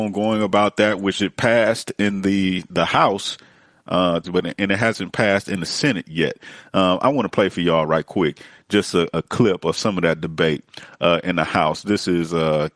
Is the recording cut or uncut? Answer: cut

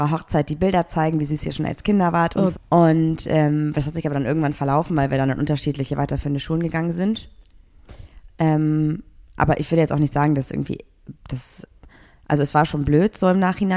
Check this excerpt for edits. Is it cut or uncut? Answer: cut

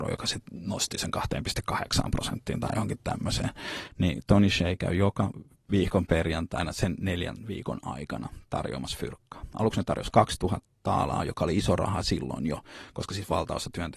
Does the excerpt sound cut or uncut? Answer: cut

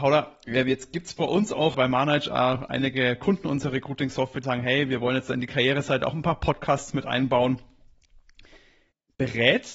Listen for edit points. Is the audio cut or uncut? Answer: cut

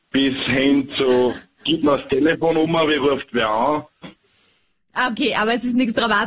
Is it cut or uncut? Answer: cut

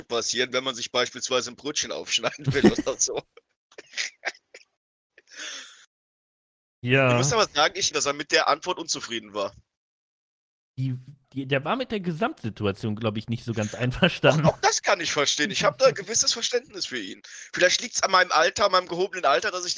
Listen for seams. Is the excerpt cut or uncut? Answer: cut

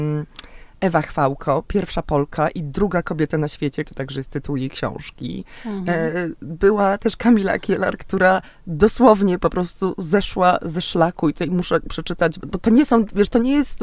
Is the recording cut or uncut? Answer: cut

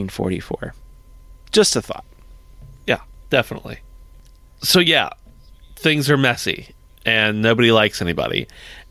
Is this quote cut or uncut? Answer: uncut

